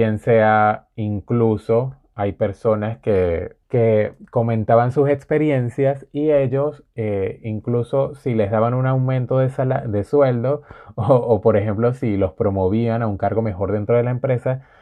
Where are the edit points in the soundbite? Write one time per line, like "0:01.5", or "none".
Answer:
0:03.6